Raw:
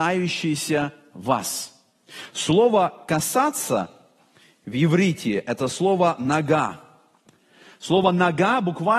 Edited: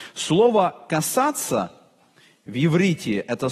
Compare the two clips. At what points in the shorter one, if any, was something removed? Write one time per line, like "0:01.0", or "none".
none